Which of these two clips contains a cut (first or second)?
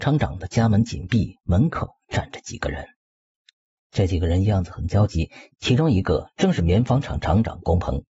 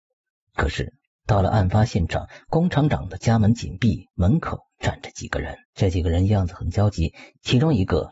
second